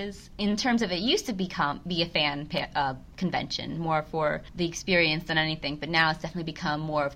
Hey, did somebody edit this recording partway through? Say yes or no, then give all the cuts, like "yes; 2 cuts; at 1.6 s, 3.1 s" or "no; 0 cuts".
yes; 1 cut; at 4.5 s